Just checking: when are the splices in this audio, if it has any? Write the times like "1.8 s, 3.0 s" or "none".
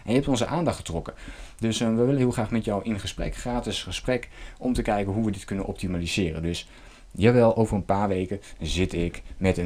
none